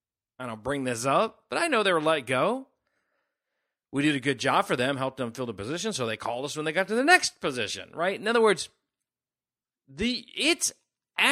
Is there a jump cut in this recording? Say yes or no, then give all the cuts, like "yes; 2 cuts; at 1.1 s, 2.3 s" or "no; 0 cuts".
no; 0 cuts